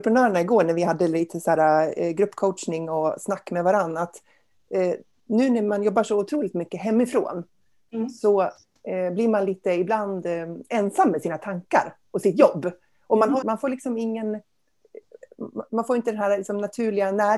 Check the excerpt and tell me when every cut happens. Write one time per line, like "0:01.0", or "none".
0:13.4